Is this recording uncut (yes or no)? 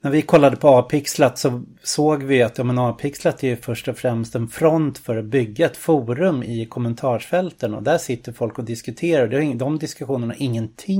yes